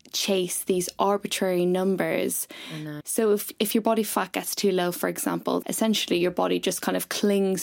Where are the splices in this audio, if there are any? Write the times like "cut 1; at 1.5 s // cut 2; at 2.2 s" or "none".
cut 1; at 3.0 s // cut 2; at 5.6 s